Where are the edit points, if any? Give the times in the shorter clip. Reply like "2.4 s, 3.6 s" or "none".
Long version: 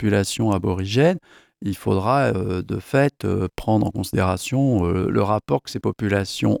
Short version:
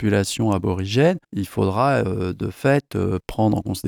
1.2 s